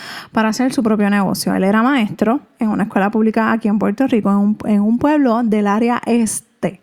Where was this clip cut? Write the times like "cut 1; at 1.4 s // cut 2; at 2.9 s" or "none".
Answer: none